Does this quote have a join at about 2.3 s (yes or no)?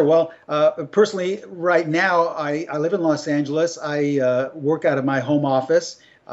no